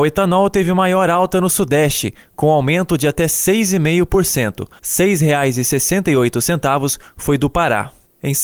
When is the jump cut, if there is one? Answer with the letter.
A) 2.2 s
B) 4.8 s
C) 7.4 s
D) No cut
B